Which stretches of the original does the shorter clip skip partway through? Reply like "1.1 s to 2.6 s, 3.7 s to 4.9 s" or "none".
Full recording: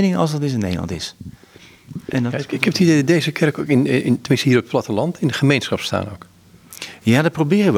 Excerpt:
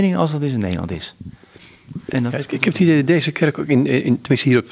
none